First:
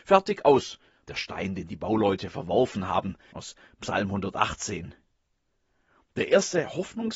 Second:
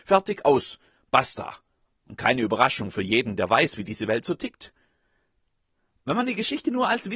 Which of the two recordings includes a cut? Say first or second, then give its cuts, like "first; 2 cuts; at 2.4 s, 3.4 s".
first; 2 cuts; at 1.0 s, 3.3 s